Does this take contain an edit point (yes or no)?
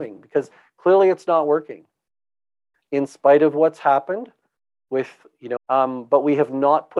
yes